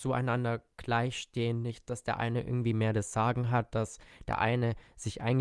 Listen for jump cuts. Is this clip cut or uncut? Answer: uncut